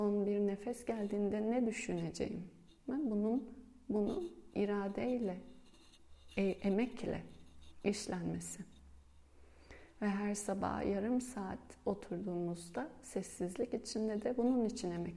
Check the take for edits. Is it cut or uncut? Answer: uncut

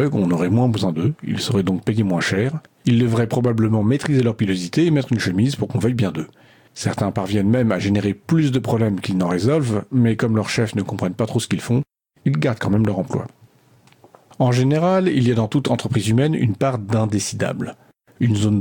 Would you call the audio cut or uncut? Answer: cut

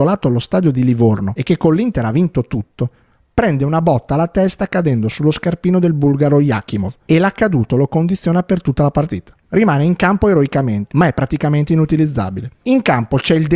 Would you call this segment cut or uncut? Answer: cut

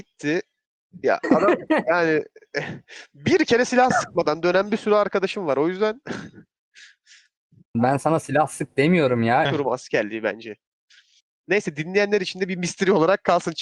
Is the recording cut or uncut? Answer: cut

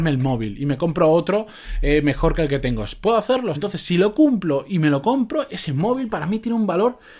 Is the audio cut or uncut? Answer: cut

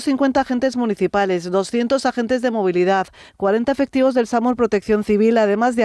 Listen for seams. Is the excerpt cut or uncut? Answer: uncut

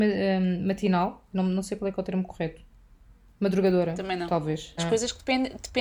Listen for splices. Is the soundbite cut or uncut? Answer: cut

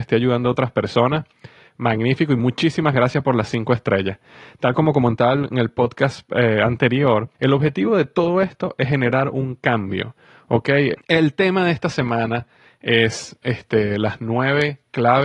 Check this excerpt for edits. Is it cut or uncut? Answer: cut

